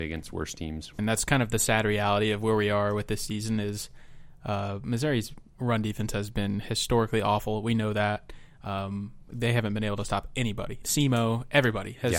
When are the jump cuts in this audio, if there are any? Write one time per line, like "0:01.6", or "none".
0:01.0
0:10.8